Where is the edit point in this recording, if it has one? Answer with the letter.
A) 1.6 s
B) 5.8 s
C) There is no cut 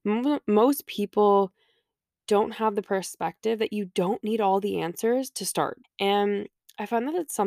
B